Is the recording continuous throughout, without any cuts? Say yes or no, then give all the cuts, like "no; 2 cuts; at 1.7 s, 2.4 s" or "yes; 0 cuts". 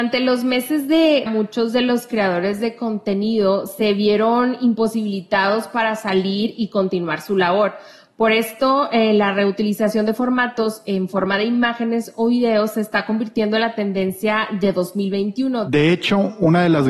no; 1 cut; at 1.3 s